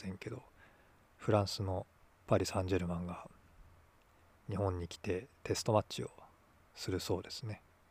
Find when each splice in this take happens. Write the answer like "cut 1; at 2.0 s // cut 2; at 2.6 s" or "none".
none